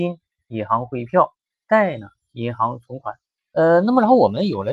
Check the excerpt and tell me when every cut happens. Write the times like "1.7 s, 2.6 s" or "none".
3.4 s